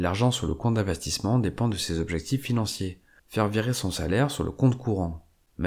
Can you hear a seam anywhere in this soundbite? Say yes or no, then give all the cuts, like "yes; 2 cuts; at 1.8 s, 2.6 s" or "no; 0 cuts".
yes; 1 cut; at 3.2 s